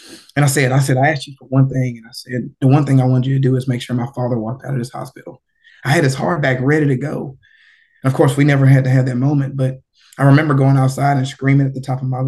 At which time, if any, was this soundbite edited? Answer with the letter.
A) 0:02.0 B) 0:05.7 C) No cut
B